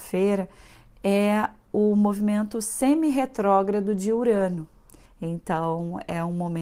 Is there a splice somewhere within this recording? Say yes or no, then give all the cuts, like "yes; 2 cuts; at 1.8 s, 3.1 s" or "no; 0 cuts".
yes; 1 cut; at 5.1 s